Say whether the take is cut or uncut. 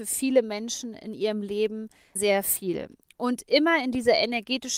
cut